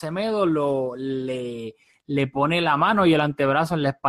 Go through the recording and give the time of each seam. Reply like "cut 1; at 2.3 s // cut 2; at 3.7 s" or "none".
none